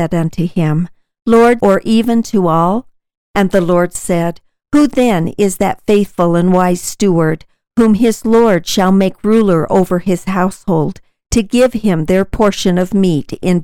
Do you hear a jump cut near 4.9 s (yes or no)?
no